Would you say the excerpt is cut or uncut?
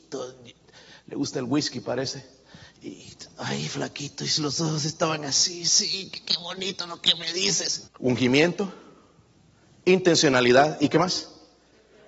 cut